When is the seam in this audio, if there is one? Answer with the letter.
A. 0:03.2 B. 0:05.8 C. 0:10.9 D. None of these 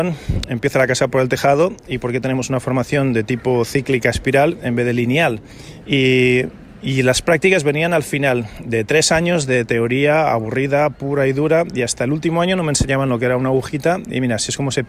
B